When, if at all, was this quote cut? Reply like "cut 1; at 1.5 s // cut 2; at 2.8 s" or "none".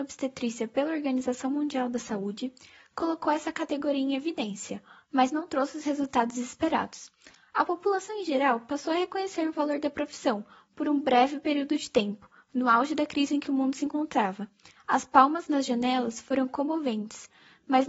cut 1; at 14.8 s